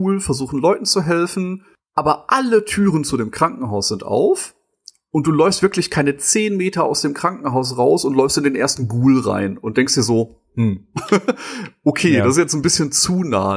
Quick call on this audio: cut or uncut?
uncut